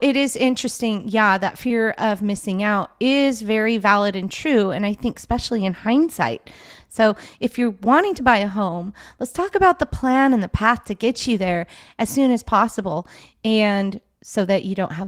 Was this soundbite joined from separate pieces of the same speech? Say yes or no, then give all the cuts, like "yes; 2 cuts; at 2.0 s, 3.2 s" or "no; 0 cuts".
no; 0 cuts